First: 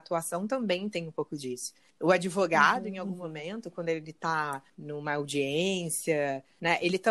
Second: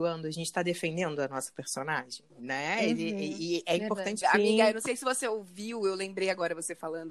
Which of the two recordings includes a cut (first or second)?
second